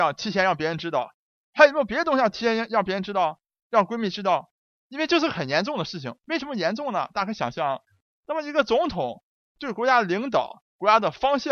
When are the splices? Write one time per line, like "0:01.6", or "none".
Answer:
0:04.7

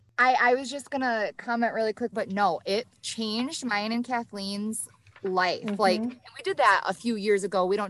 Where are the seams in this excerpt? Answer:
0:02.1

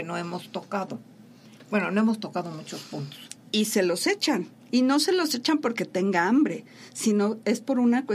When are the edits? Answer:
0:03.4

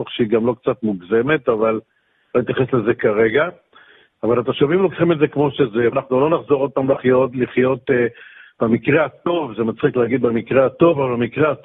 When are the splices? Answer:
0:05.9

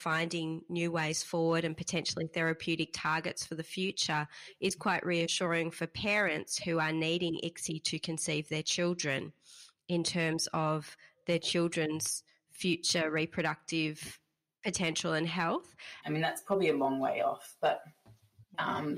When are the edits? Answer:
0:16.0

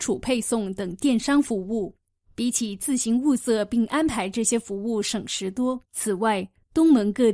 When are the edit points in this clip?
0:05.8

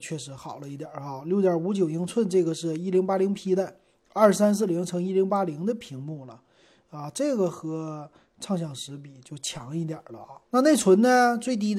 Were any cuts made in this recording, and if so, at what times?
0:10.5

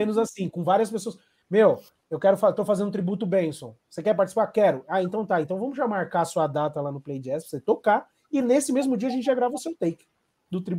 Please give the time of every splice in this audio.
none

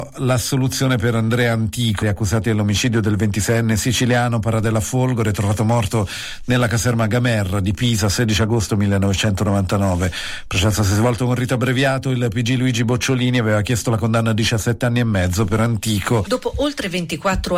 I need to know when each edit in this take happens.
0:02.0
0:16.3

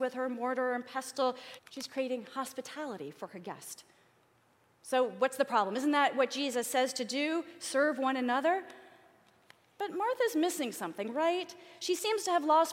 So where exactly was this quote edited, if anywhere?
0:01.6

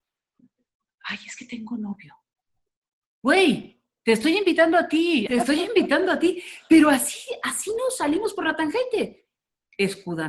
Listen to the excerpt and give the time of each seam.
0:05.3

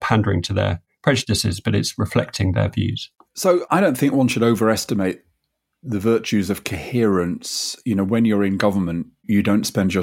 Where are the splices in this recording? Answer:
none

